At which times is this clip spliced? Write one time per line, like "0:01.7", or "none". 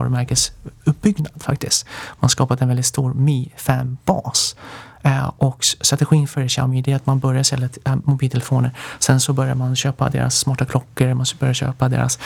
none